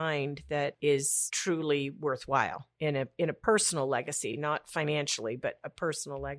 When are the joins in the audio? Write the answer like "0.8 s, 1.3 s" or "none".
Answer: none